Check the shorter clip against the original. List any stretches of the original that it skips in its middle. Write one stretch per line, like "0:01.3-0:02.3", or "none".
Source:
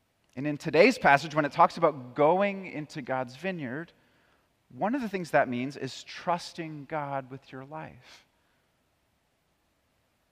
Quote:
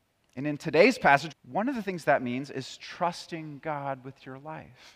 0:01.3-0:04.6